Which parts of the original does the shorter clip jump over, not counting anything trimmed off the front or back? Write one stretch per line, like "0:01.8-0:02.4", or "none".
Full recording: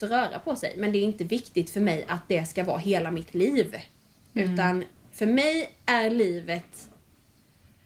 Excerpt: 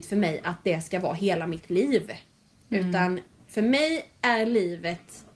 none

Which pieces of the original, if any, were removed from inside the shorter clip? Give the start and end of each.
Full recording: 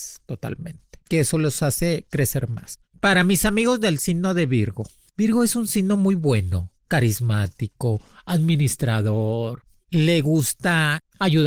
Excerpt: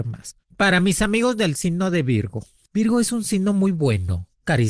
none

